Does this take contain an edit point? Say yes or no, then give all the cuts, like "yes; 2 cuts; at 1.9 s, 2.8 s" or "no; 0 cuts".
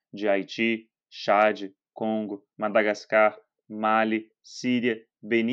no; 0 cuts